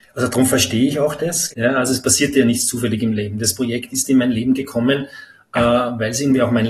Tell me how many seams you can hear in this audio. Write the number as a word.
one